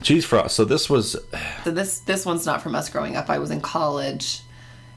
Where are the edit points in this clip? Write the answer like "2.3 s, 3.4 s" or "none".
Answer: 1.6 s